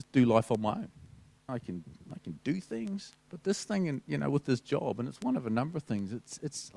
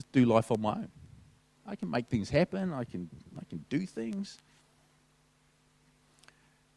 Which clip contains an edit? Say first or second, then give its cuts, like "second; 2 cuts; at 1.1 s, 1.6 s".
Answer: first; 2 cuts; at 1.5 s, 3.2 s